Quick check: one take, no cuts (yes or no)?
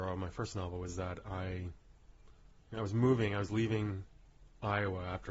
yes